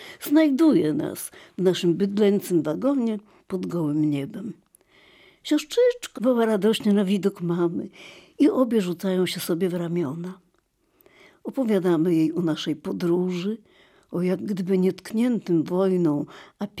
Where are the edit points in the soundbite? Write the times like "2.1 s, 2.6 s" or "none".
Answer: 6.2 s